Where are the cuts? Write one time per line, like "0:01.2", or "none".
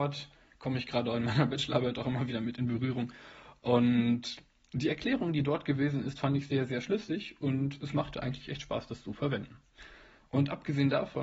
none

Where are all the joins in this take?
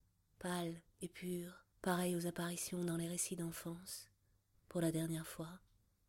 0:01.7
0:04.5

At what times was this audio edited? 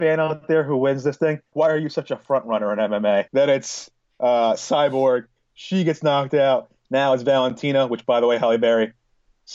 0:01.5
0:03.3

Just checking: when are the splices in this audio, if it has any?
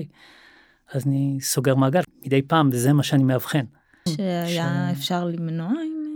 0:02.0
0:04.1

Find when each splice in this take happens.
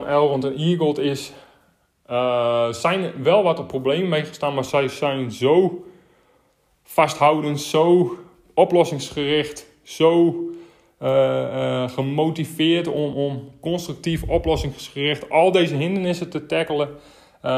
0:13.1

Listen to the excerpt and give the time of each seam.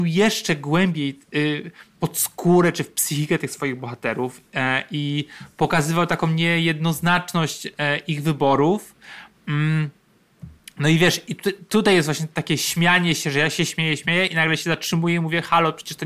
0:13.7

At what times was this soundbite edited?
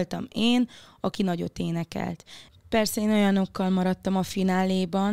0:02.5

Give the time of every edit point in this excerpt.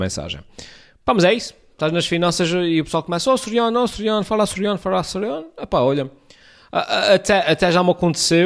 none

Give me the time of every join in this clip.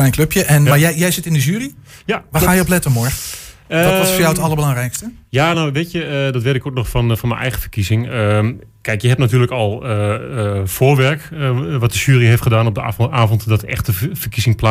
none

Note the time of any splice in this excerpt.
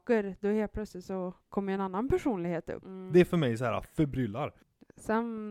0:02.8

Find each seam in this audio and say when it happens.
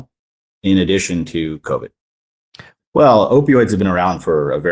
0:02.8

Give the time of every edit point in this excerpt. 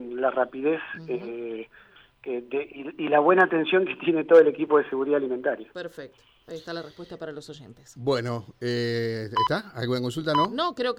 none

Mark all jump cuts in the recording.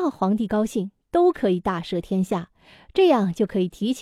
none

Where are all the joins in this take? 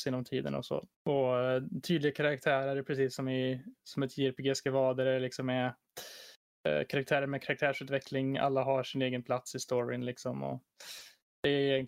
0:00.9

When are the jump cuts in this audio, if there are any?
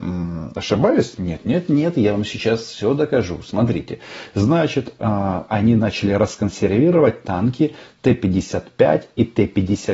none

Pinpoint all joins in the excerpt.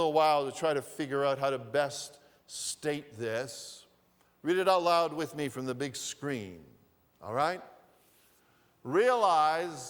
none

